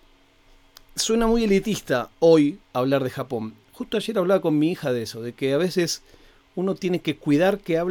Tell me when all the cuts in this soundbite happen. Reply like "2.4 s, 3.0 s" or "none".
2.6 s